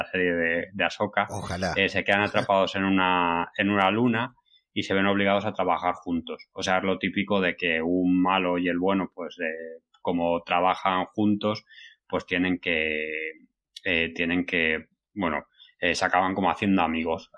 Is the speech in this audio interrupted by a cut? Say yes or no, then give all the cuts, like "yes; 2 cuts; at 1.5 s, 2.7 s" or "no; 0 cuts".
no; 0 cuts